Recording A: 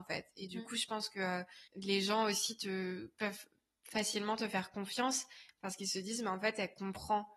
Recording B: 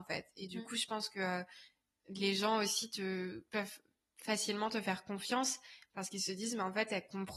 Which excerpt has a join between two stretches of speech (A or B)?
A